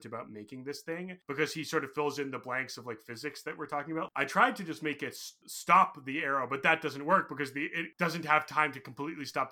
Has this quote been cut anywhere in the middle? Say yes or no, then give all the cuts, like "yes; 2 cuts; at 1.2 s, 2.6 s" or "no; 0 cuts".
no; 0 cuts